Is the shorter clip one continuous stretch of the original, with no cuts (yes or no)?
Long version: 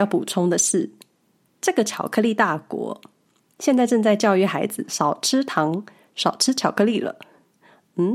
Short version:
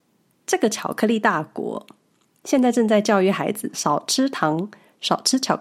yes